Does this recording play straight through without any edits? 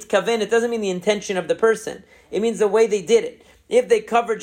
yes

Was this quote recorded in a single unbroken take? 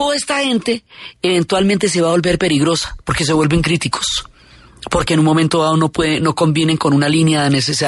no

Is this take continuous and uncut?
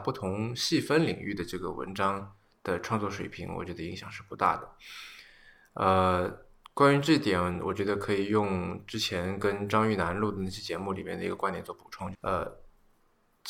no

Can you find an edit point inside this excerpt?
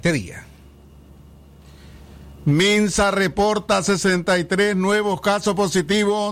no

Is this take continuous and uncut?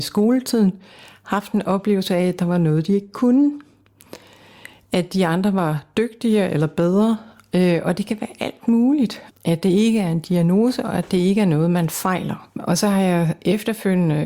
no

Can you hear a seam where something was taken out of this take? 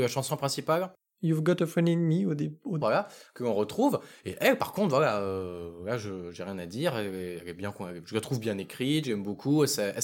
yes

